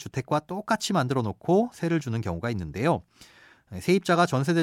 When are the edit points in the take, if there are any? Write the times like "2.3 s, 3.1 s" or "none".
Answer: 3.6 s